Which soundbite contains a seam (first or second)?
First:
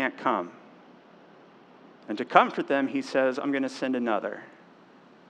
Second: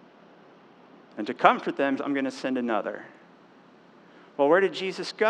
second